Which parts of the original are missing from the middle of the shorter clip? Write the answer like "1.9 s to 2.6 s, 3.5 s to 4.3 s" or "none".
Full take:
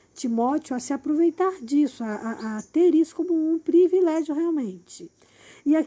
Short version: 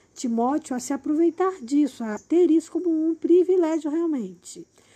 2.2 s to 2.6 s

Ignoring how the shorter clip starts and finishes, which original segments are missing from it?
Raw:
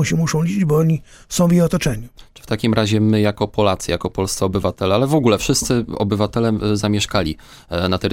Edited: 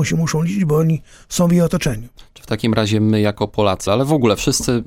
3.9 s to 4.9 s

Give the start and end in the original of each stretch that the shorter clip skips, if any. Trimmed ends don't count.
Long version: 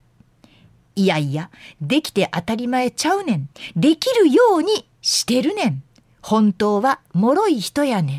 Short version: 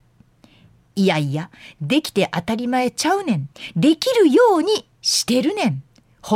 none

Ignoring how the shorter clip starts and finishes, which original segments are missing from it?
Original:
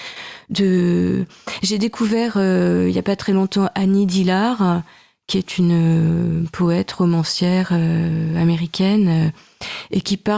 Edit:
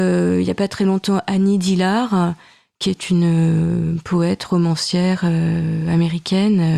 none

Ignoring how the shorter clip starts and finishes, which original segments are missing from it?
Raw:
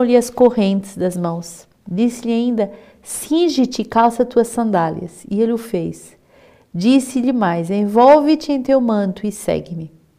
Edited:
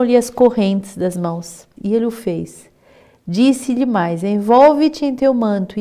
1.8 s to 5.2 s

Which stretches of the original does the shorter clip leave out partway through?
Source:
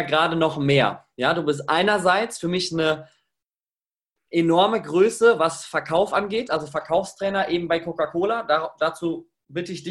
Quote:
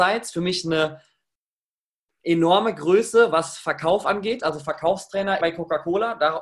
7.5 s to 7.7 s

